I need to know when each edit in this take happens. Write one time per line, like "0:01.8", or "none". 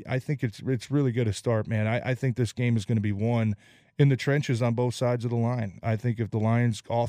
none